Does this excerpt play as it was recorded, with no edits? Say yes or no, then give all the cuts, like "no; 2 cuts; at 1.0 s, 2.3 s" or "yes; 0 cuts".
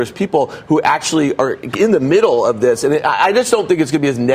yes; 0 cuts